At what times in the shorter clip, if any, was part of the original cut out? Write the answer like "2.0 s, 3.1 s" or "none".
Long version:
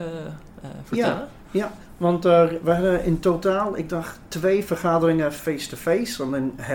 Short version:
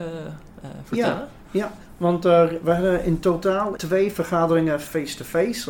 3.8 s

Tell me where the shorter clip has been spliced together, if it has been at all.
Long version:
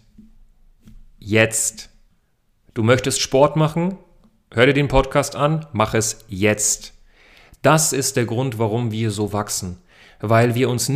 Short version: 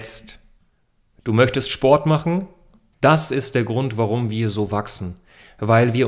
2.9 s

